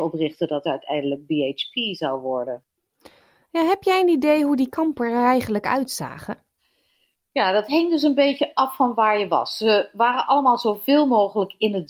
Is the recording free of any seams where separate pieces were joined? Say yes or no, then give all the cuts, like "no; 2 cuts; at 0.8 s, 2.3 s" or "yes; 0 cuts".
yes; 0 cuts